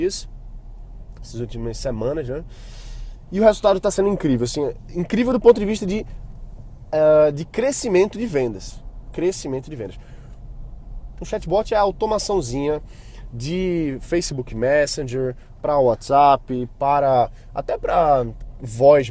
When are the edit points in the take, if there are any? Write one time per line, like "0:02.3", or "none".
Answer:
0:11.1